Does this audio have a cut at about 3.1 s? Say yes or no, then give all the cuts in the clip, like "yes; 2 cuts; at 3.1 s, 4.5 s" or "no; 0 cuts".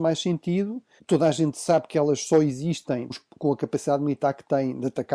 yes; 2 cuts; at 1.0 s, 3.1 s